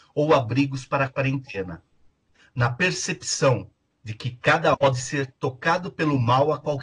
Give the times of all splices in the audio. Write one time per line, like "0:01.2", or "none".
0:04.7